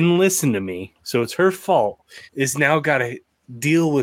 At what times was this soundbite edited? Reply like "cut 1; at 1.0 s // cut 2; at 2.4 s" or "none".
cut 1; at 2.3 s